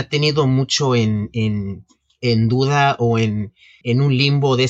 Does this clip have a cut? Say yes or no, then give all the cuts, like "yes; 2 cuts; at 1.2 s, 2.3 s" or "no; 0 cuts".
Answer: yes; 1 cut; at 3.8 s